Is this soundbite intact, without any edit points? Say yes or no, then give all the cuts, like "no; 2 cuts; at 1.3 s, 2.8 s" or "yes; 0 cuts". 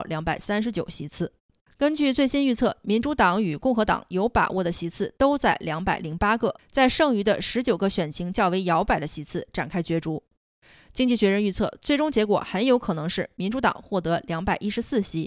yes; 0 cuts